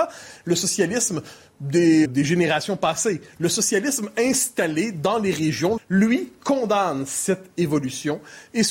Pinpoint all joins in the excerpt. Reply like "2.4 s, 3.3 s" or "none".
2.0 s, 5.8 s